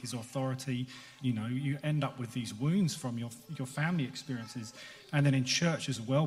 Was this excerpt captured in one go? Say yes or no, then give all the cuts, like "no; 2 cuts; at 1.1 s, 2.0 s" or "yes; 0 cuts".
no; 1 cut; at 1.2 s